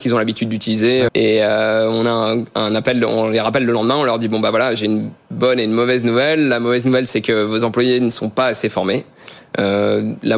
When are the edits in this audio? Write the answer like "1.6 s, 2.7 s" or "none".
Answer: 1.1 s